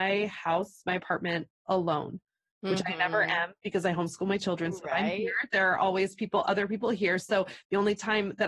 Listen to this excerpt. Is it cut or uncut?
uncut